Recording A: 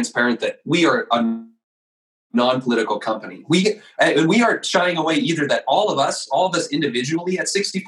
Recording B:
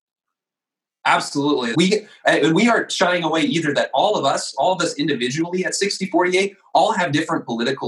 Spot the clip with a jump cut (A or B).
B